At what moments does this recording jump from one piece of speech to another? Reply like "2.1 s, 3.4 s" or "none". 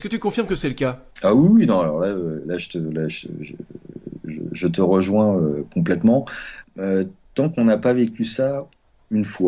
1.1 s, 6.6 s